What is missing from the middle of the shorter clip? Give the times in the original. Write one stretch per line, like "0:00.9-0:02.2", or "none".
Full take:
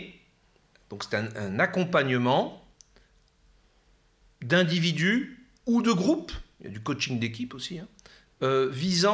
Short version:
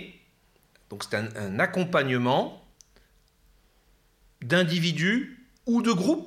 none